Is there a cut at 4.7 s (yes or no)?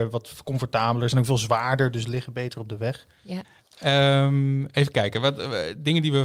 no